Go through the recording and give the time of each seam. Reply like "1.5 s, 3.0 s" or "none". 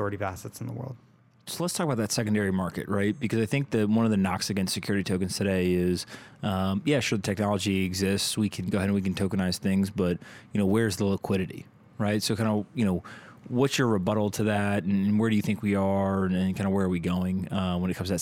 none